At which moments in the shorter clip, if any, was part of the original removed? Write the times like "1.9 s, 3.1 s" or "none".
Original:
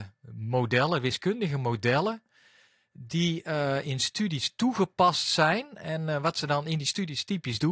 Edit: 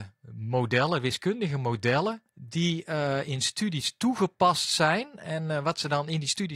2.3 s